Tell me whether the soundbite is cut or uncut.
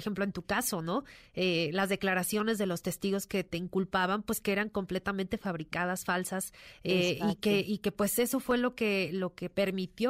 uncut